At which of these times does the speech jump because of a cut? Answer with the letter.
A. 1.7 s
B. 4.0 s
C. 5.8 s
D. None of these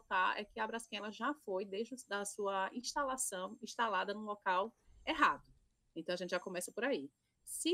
D